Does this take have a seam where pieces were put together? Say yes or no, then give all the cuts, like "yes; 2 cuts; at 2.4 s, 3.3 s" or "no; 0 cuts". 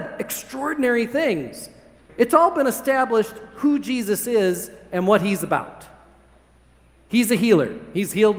yes; 1 cut; at 2.1 s